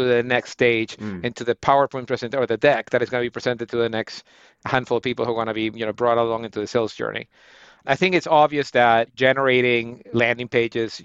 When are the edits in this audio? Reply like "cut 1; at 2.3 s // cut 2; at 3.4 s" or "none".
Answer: none